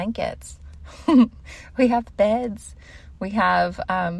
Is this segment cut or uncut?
uncut